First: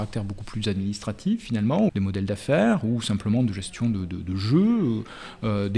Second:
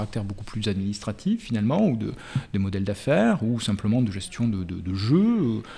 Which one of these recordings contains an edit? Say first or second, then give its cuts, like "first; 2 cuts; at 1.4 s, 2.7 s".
first; 1 cut; at 1.9 s